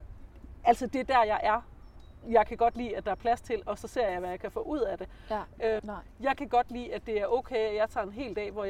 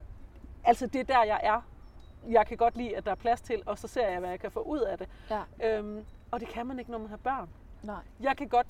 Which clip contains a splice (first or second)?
first